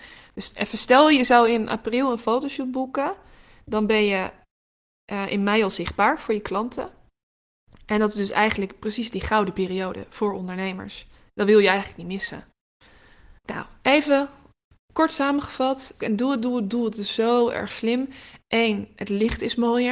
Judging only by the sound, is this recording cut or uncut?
cut